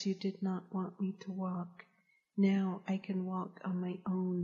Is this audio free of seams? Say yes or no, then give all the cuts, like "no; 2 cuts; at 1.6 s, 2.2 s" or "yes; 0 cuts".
yes; 0 cuts